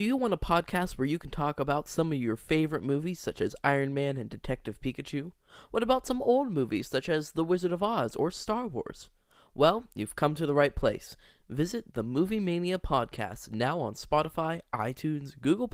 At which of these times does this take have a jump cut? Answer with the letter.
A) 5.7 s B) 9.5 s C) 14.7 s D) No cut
D